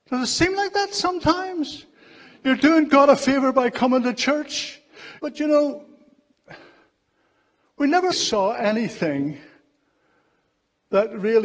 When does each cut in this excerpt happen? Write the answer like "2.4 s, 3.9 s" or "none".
5.2 s, 8.1 s